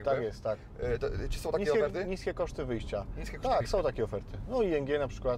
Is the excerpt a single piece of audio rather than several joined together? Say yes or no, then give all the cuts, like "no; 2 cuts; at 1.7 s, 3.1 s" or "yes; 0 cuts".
yes; 0 cuts